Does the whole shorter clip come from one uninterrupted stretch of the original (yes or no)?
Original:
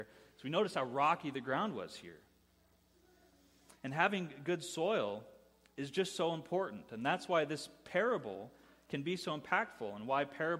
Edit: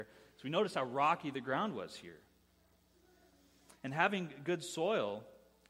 yes